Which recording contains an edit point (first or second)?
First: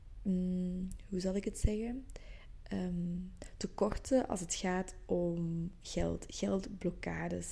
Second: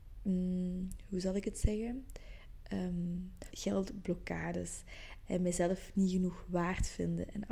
second